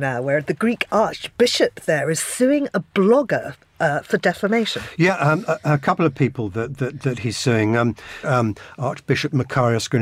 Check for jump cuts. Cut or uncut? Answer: cut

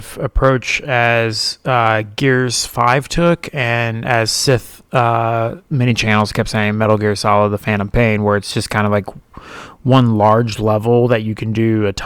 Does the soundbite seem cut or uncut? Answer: cut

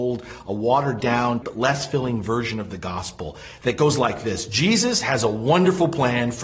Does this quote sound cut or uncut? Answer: cut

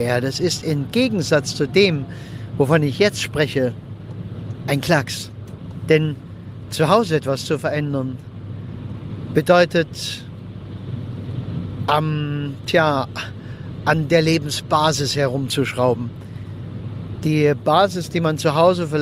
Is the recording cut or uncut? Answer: uncut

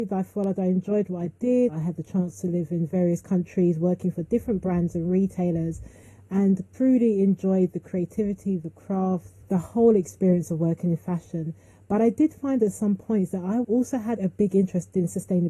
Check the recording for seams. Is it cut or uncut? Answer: cut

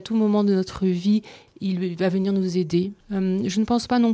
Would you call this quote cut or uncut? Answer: cut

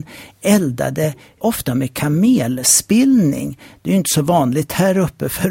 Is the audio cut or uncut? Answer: cut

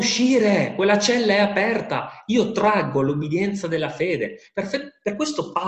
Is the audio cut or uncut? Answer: uncut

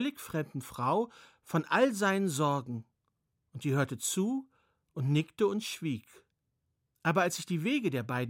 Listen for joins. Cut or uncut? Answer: uncut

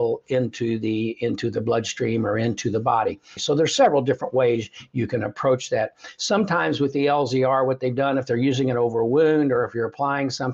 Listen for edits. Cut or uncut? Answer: cut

